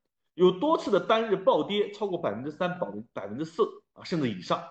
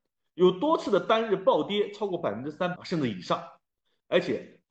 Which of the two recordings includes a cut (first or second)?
second